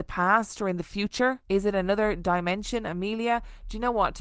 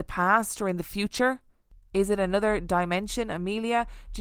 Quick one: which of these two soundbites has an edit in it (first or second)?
first